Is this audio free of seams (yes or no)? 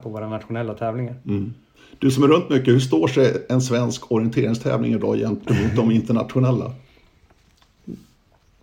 yes